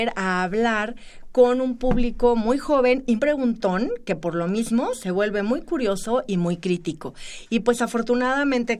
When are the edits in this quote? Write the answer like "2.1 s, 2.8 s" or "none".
3.2 s

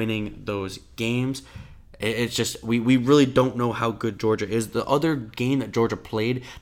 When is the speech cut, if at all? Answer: none

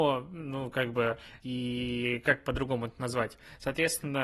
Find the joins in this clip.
1.4 s

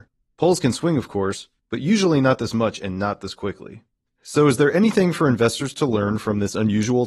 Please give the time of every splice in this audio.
none

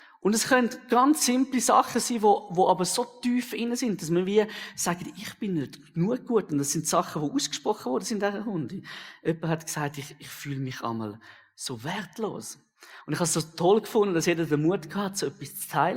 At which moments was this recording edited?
none

